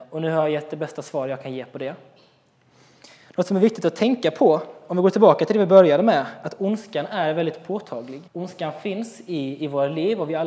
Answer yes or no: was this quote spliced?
yes